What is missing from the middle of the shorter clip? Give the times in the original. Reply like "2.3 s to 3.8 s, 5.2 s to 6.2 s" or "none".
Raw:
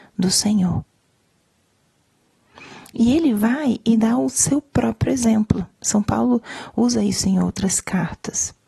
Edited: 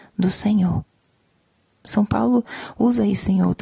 1.8 s to 5.8 s